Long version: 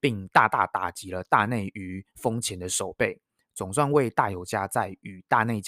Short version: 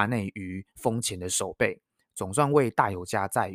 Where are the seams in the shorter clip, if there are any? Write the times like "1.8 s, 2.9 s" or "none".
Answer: none